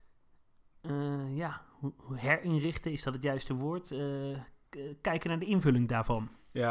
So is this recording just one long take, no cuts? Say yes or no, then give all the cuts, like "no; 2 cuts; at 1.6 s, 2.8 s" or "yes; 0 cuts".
yes; 0 cuts